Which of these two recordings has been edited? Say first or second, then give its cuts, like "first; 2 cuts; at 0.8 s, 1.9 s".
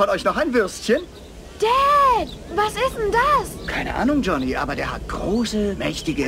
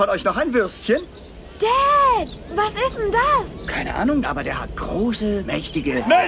second; 1 cut; at 4.2 s